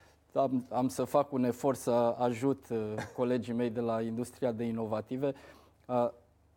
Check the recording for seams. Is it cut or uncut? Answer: uncut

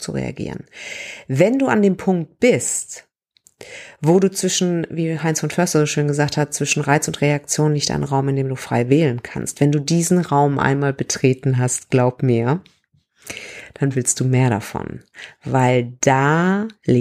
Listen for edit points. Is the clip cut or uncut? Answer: uncut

